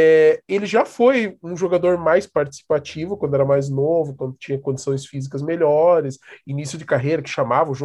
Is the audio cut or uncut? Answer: uncut